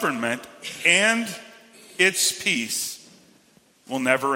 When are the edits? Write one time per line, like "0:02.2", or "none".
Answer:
none

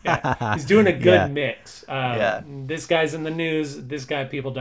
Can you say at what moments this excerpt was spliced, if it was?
none

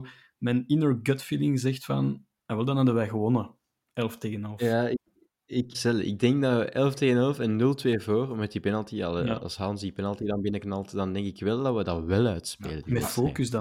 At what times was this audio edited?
0:05.7

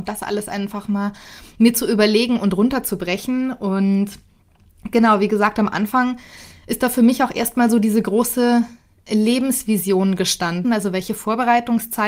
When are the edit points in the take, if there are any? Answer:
0:10.6

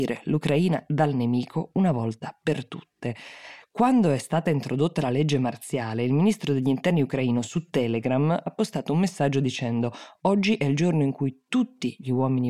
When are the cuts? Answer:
0:03.6

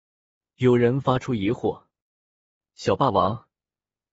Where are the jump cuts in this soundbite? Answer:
none

